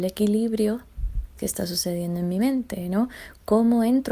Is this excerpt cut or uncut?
cut